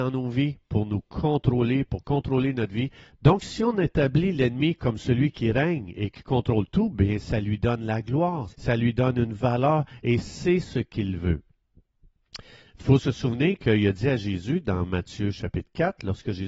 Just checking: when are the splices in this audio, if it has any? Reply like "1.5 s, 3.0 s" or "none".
3.1 s, 8.5 s